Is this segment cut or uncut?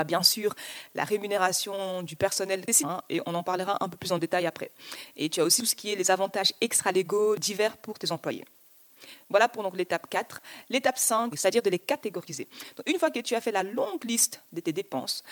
cut